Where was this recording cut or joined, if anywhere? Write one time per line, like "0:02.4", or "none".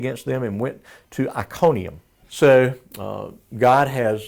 0:02.2